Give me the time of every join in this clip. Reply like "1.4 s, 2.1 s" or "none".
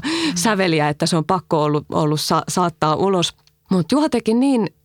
3.7 s